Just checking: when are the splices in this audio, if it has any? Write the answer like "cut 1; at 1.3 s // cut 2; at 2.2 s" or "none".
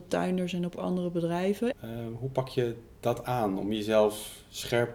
cut 1; at 1.7 s